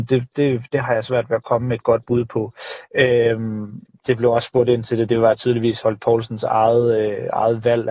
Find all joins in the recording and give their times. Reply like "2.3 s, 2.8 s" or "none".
none

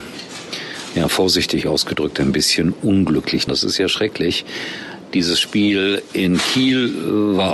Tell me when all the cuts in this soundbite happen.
3.5 s

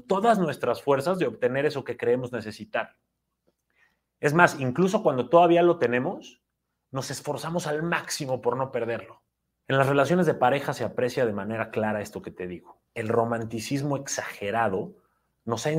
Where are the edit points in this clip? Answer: 9.6 s, 12.9 s

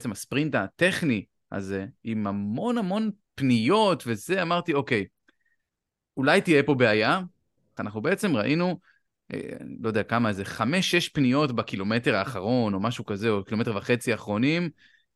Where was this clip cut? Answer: 7.8 s

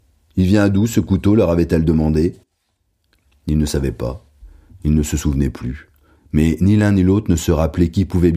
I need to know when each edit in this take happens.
6.1 s

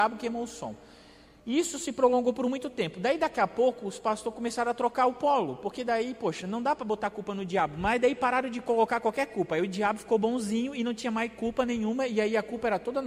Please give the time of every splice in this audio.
none

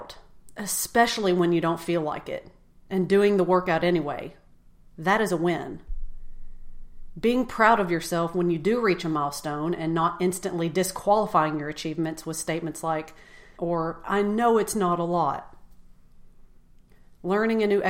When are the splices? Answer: 13.6 s

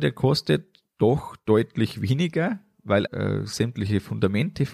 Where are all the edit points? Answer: 3.1 s

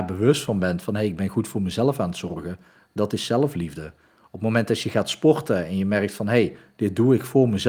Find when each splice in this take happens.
none

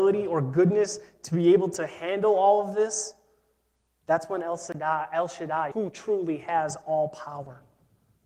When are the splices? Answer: 5.7 s

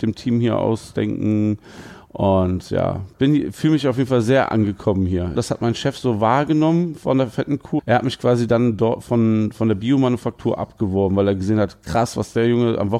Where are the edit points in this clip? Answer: 5.4 s, 7.8 s

